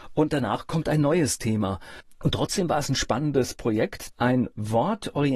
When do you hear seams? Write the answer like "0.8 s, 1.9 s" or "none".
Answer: 2.1 s